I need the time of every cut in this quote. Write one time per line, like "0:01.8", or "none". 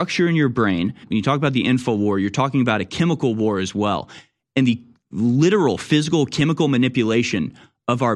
0:01.0